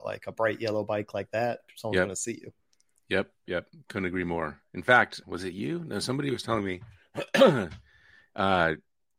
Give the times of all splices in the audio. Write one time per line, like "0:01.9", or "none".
0:03.5
0:05.2